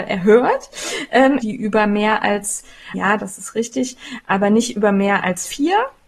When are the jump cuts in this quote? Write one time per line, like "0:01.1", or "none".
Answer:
0:01.4
0:02.9